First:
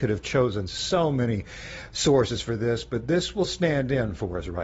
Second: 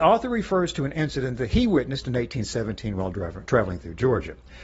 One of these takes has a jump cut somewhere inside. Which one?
second; 1 cut; at 3.5 s

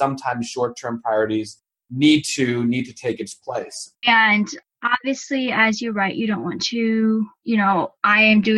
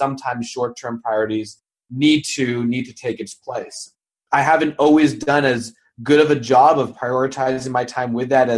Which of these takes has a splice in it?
first; 1 cut; at 4.0 s

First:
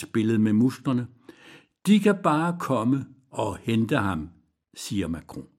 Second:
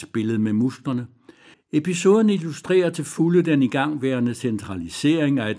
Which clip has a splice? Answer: second; 1 cut; at 1.5 s

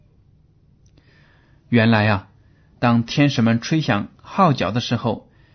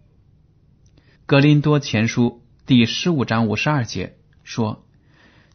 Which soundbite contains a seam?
second; 1 cut; at 1.2 s

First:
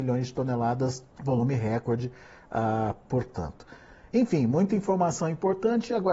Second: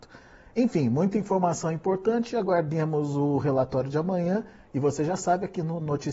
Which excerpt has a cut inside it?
first; 2 cuts; at 1.1 s, 3.0 s

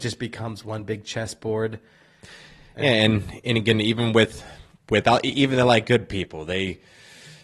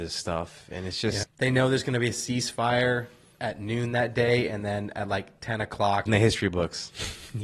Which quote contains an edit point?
second; 2 cuts; at 1.2 s, 6.1 s

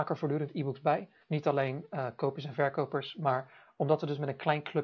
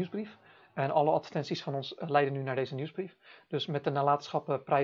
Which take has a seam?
first; 1 cut; at 1.2 s

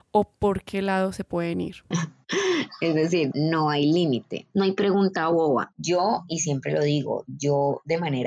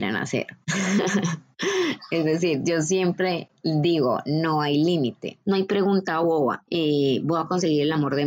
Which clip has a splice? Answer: first; 3 cuts; at 1.9 s, 3.3 s, 5.7 s

